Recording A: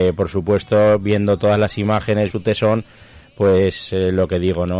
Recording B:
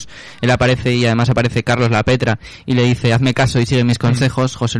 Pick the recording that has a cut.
A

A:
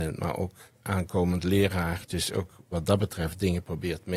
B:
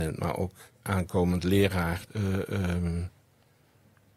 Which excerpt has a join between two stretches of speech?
B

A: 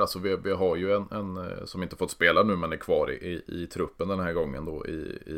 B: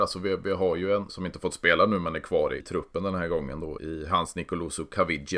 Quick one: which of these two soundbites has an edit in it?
B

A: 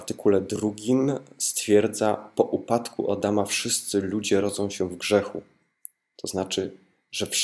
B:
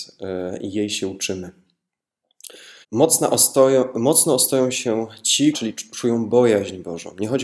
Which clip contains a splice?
B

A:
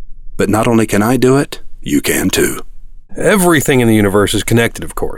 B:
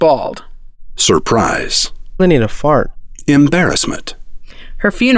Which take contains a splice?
B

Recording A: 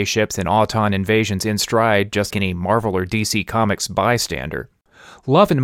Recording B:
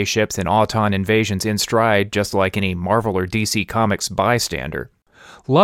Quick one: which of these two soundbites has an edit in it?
A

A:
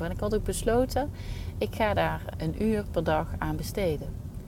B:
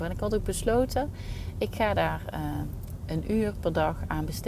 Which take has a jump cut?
A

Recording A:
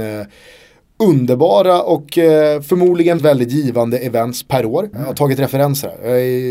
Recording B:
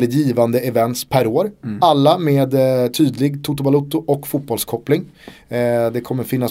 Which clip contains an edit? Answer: A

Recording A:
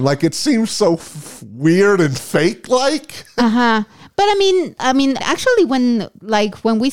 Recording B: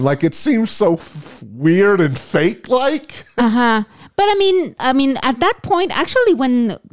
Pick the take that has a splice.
A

